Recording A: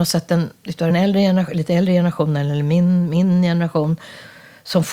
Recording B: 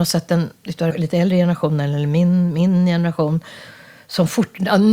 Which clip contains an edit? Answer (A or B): B